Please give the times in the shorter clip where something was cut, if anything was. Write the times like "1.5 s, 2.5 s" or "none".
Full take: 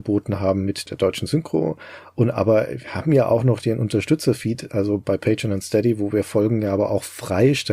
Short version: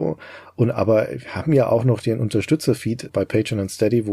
3.1 s